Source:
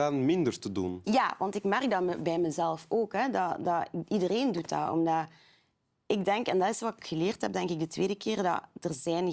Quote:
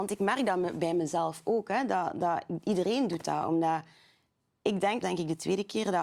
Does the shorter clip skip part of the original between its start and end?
yes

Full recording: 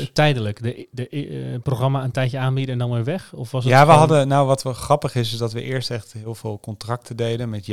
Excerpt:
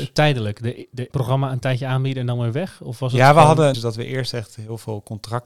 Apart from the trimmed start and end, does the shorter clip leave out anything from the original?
yes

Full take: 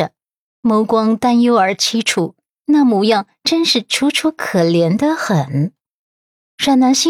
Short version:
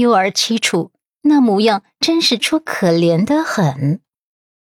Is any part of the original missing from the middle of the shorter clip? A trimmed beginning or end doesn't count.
yes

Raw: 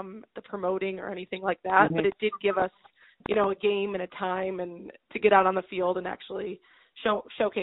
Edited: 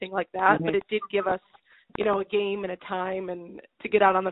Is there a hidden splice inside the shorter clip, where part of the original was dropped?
no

